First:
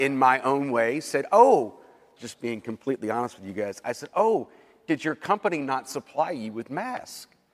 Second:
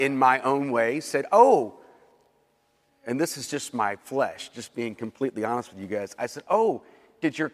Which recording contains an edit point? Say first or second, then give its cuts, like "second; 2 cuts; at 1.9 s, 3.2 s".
first; 1 cut; at 2.2 s